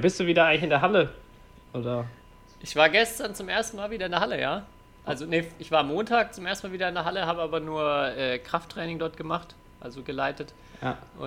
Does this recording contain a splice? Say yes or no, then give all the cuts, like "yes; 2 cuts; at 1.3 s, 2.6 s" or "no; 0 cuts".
no; 0 cuts